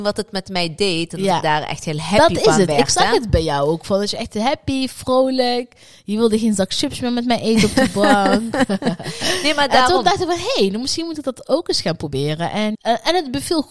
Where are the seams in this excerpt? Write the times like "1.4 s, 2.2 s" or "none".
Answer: 12.7 s